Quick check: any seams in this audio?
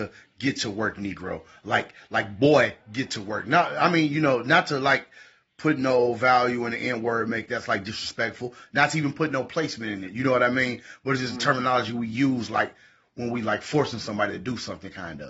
no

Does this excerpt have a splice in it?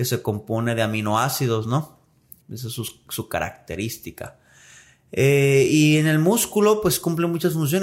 yes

